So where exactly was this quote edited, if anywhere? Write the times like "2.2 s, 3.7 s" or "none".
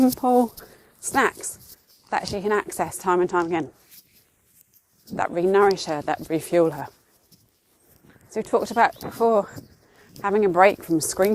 none